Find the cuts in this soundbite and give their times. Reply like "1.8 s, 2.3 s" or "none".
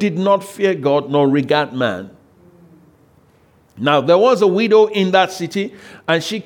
none